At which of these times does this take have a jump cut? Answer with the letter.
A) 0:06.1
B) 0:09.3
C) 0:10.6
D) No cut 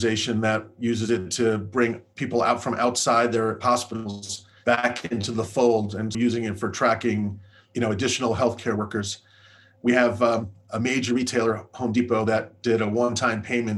A